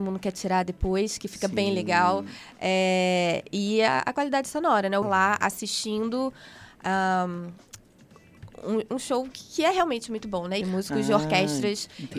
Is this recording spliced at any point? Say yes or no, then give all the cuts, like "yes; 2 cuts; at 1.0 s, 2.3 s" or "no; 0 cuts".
yes; 2 cuts; at 5.0 s, 10.6 s